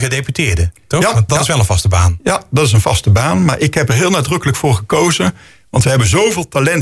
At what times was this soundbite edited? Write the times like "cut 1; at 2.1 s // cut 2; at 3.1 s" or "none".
cut 1; at 1.3 s